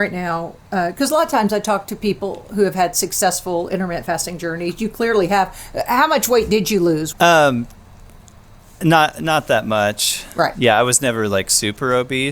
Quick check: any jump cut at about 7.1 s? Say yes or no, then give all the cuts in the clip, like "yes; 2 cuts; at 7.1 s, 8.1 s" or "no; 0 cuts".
yes; 1 cut; at 7.1 s